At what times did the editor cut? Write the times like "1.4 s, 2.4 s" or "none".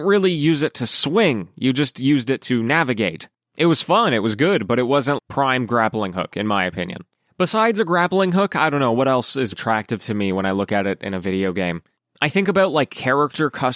5.2 s, 9.5 s